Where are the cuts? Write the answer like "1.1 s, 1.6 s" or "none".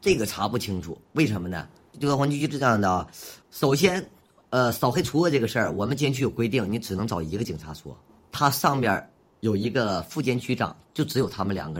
none